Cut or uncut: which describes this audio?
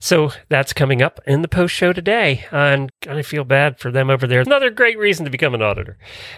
cut